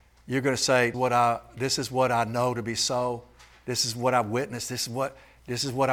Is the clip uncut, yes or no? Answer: no